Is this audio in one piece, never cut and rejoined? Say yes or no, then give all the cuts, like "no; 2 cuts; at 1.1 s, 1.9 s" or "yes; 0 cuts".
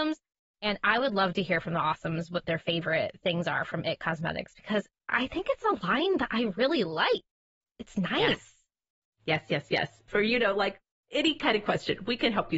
no; 1 cut; at 10.1 s